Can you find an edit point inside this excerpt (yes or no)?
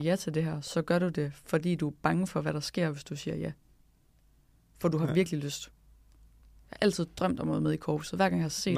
no